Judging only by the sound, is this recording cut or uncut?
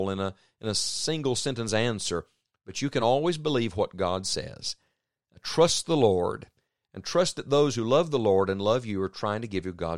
uncut